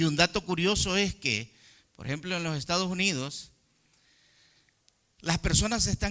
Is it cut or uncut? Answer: uncut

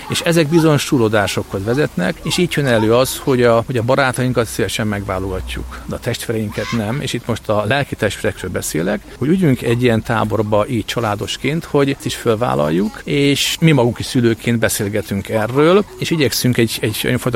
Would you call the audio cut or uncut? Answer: uncut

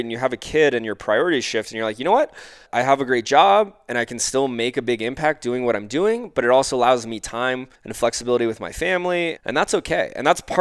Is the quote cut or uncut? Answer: cut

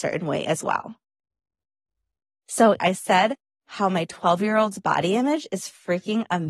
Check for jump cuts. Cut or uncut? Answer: cut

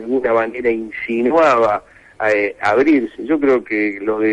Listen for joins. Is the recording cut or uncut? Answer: uncut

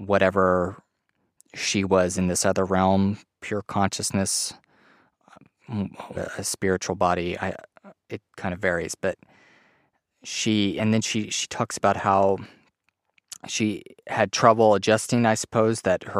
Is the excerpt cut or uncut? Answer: cut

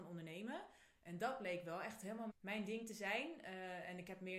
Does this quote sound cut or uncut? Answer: cut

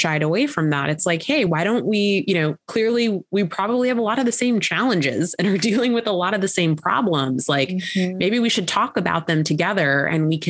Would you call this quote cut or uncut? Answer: uncut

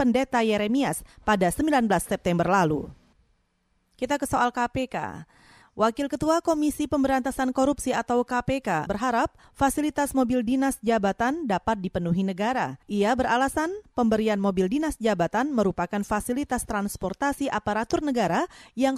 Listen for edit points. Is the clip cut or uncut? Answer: cut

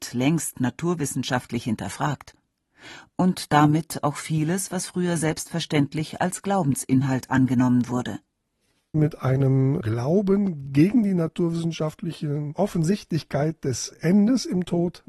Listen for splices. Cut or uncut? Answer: uncut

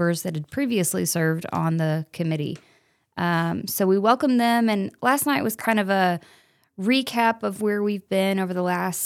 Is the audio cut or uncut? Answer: uncut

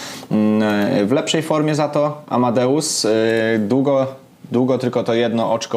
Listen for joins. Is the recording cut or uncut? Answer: uncut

